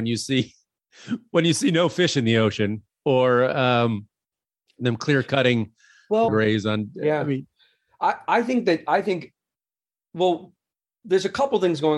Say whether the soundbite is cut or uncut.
cut